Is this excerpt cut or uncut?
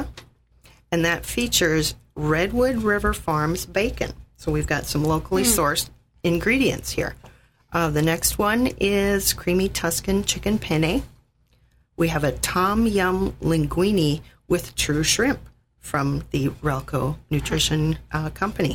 uncut